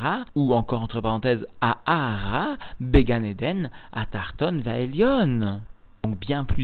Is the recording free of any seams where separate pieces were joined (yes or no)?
yes